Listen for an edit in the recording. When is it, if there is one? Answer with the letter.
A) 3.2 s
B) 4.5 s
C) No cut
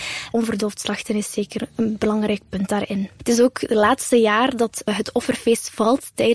A